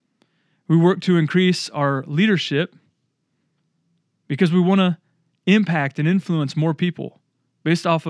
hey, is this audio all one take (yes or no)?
yes